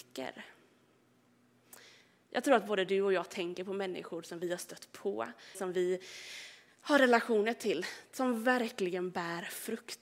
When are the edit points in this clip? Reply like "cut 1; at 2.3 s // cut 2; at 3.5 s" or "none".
cut 1; at 5.5 s